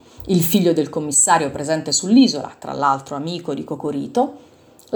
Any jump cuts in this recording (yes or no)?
no